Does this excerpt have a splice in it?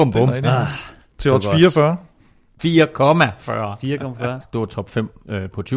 yes; 2 cuts; at 2.6 s, 4.4 s

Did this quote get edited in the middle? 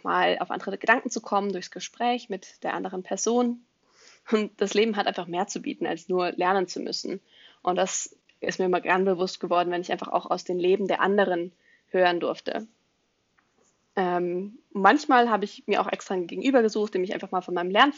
no; 0 cuts

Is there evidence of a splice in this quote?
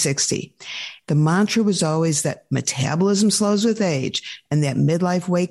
yes; 1 cut; at 1.0 s

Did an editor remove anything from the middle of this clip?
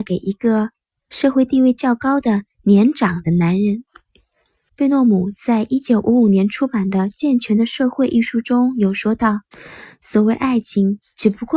yes; 2 cuts; at 4.7 s, 9.5 s

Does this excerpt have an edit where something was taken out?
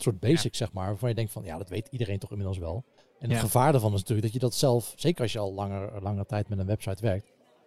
no; 0 cuts

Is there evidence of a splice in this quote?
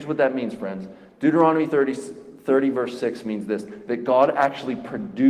no; 0 cuts

